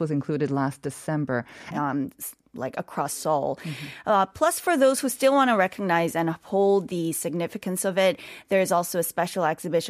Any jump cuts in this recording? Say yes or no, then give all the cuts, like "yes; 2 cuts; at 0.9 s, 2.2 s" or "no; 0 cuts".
yes; 1 cut; at 1.7 s